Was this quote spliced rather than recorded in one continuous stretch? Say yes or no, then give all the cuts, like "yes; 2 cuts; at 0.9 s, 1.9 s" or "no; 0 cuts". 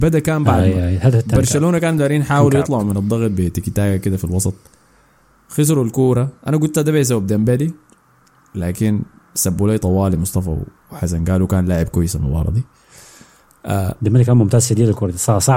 no; 0 cuts